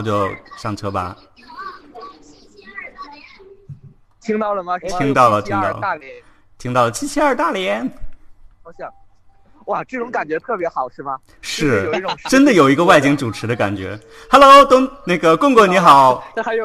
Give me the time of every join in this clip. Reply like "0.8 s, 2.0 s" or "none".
none